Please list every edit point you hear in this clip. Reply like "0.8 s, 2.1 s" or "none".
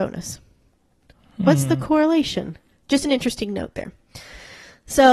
2.7 s